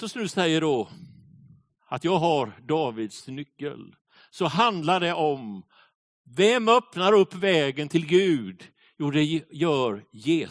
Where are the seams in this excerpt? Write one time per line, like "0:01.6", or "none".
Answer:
none